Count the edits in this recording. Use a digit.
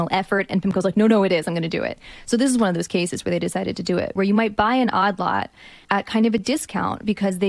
2